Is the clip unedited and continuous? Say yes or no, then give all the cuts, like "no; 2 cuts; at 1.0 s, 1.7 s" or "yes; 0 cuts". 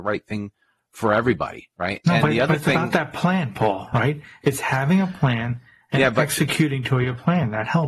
yes; 0 cuts